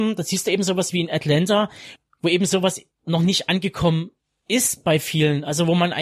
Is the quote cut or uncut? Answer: uncut